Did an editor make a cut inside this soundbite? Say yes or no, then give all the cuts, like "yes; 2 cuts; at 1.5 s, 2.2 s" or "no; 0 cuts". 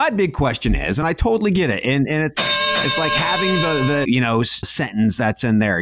yes; 2 cuts; at 2.3 s, 4.0 s